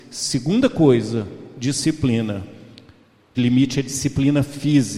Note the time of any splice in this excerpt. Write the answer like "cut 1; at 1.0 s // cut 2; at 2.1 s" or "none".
cut 1; at 3.3 s